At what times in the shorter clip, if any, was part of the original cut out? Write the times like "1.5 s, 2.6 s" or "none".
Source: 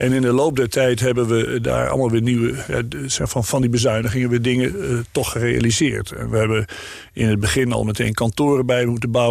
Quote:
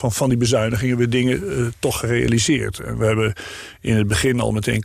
none